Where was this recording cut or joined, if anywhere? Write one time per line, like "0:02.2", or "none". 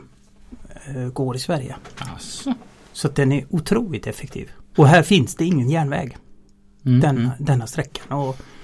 0:04.7